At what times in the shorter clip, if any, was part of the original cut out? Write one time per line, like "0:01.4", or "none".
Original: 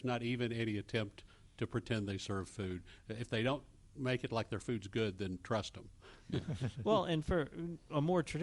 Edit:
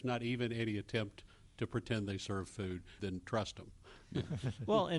0:03.0